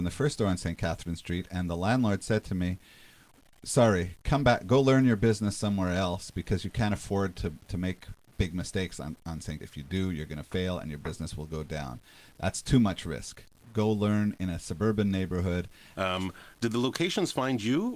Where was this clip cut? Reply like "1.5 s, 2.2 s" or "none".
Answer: 9.6 s, 15.9 s